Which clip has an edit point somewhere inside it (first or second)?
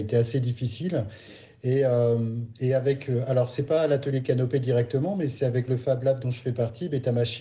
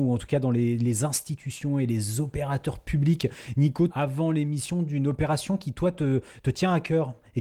second